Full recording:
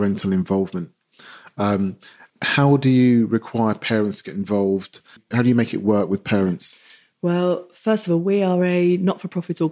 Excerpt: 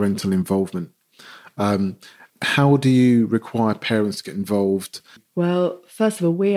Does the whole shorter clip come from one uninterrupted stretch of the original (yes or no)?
no